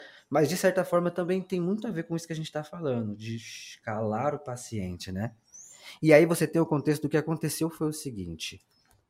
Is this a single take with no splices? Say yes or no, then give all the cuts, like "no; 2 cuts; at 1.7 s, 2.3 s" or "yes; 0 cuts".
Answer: yes; 0 cuts